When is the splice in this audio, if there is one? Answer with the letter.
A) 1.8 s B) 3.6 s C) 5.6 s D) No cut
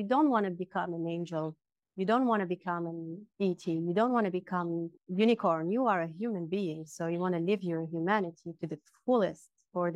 D